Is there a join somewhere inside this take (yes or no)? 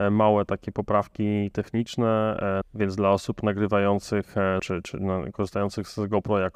yes